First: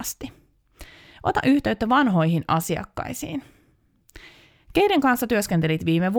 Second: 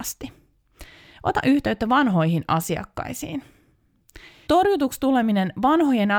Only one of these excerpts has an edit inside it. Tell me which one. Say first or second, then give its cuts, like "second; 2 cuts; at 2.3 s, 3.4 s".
second; 1 cut; at 4.5 s